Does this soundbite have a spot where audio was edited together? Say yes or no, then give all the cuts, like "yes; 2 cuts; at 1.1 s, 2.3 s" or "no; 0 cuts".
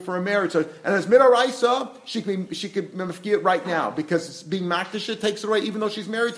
no; 0 cuts